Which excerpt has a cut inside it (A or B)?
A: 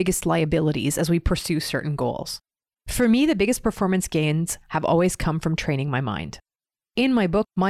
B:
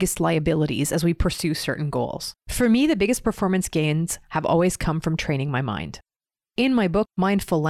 B